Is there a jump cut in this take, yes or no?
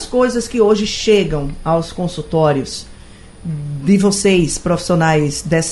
no